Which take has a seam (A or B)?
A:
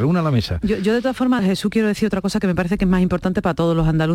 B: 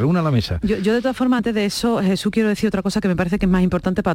A